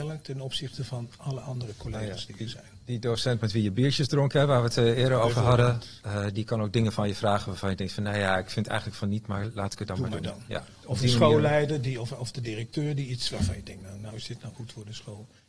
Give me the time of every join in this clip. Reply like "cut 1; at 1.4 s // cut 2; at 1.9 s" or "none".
cut 1; at 13.8 s